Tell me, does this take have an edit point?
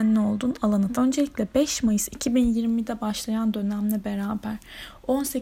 yes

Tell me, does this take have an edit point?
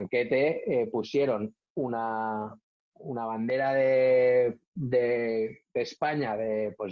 no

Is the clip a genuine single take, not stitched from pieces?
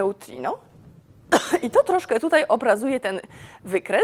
yes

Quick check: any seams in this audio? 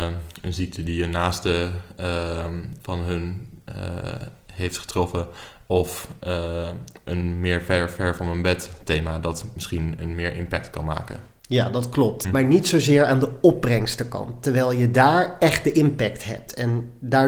yes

